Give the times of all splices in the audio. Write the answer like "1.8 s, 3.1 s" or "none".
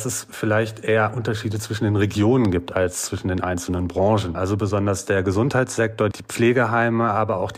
4.3 s, 6.1 s